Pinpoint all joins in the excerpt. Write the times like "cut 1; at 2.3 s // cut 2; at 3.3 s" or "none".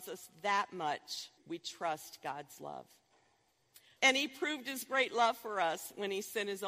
cut 1; at 1.4 s // cut 2; at 4.0 s

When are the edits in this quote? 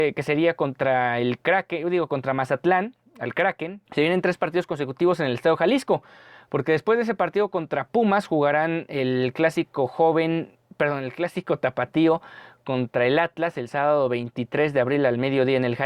cut 1; at 3.8 s

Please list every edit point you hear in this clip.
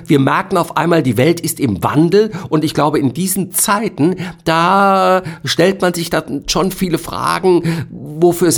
none

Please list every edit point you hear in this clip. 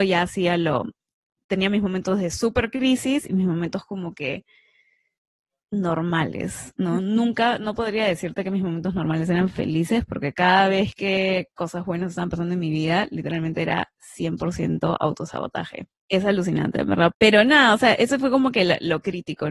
cut 1; at 15.9 s // cut 2; at 17.1 s

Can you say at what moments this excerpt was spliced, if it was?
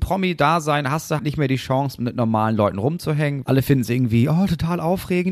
cut 1; at 1.2 s // cut 2; at 3.4 s

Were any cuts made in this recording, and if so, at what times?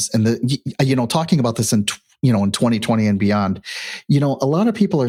none

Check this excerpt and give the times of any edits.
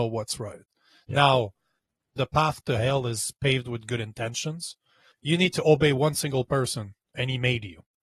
cut 1; at 2.2 s // cut 2; at 5.1 s

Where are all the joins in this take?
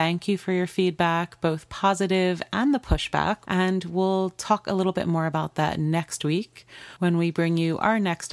cut 1; at 3.4 s

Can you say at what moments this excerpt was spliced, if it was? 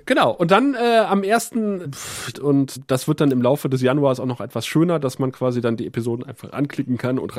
cut 1; at 2.3 s

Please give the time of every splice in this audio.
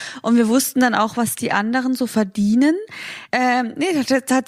cut 1; at 3.3 s

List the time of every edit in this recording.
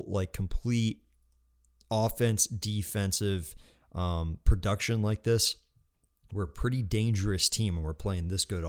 none

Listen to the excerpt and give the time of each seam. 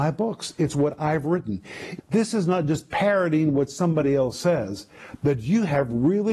cut 1; at 2.0 s

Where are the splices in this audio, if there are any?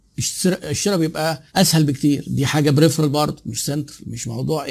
cut 1; at 1.5 s

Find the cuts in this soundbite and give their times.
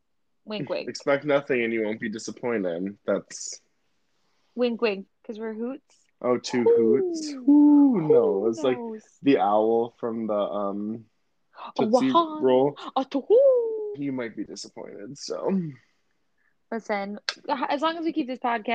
cut 1; at 5.1 s // cut 2; at 13.9 s

